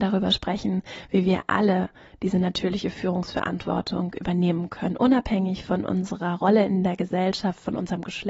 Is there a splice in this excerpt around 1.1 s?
no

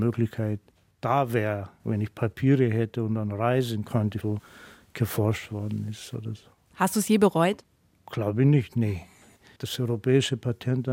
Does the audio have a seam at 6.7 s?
yes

